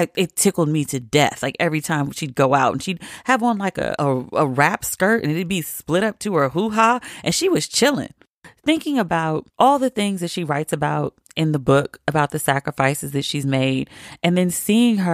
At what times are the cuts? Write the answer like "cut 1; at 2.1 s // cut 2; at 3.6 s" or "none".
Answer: cut 1; at 4.0 s // cut 2; at 9.5 s